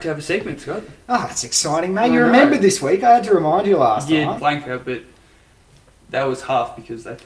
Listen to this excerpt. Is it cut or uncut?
cut